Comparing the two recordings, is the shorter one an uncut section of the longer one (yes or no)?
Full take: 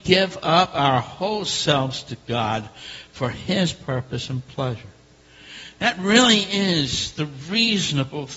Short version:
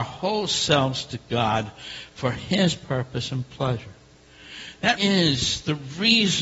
no